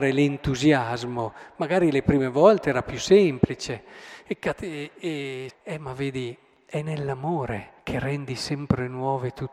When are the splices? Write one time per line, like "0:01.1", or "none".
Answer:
0:05.5
0:07.8